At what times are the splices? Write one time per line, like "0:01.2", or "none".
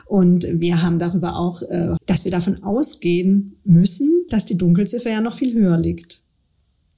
0:02.0
0:04.3